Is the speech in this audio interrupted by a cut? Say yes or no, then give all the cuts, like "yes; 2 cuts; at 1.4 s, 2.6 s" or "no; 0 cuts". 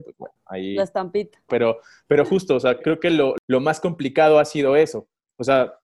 yes; 2 cuts; at 1.5 s, 2.8 s